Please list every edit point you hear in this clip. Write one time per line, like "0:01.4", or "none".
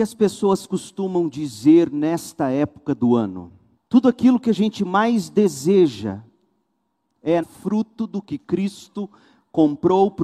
0:03.8
0:07.4